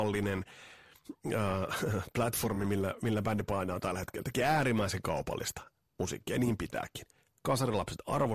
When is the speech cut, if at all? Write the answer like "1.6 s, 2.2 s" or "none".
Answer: none